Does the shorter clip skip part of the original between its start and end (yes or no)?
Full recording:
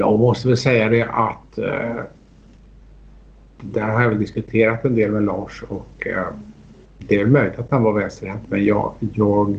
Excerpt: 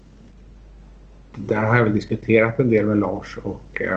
no